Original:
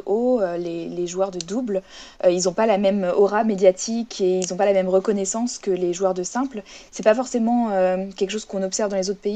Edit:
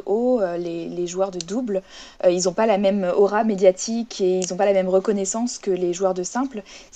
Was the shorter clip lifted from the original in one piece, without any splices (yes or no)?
yes